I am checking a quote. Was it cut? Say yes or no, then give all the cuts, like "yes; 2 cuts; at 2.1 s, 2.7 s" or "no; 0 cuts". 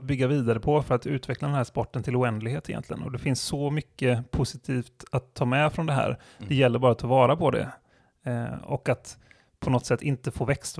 no; 0 cuts